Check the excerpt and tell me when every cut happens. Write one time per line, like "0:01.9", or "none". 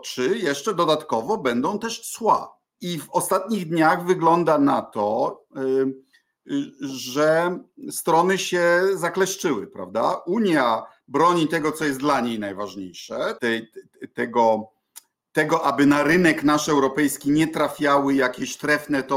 0:02.7
0:13.4